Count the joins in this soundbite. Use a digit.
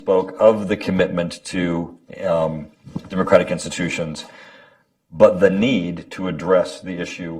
0